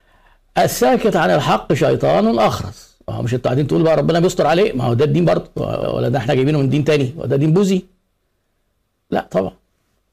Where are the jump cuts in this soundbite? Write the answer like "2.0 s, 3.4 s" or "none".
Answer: 5.8 s